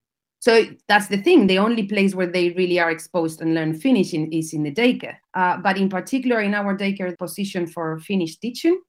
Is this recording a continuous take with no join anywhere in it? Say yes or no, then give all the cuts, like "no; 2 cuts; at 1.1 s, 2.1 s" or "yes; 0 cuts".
no; 2 cuts; at 5.2 s, 7.2 s